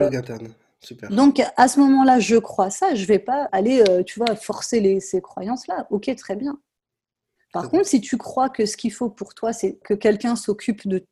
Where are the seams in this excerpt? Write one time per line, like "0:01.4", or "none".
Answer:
0:03.5
0:09.8

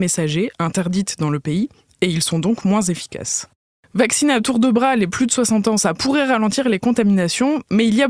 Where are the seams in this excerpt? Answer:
none

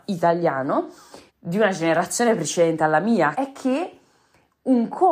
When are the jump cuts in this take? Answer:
0:01.3
0:03.3

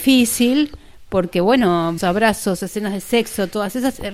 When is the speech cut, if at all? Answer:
0:02.0

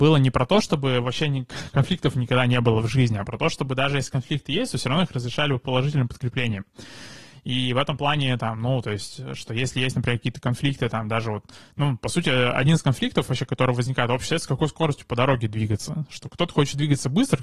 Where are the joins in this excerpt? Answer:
none

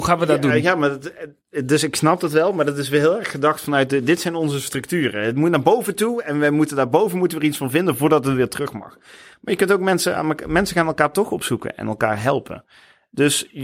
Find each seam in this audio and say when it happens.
none

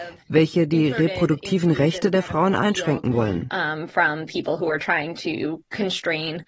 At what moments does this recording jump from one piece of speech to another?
none

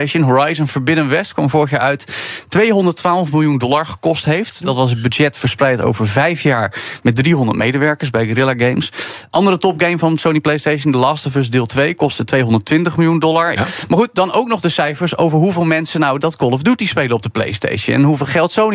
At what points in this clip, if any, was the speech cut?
0:13.6

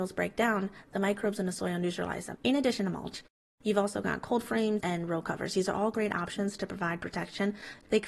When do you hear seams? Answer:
0:02.4
0:04.8

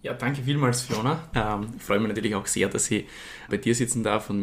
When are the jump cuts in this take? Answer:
0:01.3
0:03.5

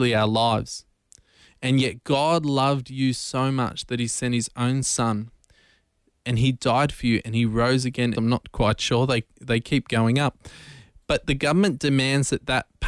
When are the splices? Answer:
0:08.1

